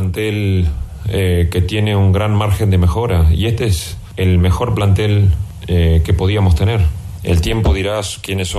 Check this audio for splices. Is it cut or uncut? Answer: cut